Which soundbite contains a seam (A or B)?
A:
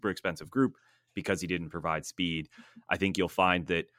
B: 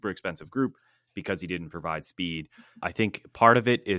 B